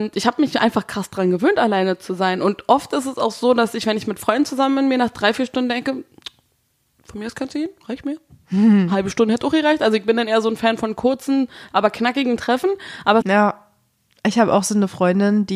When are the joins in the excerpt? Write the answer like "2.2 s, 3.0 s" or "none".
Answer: 13.2 s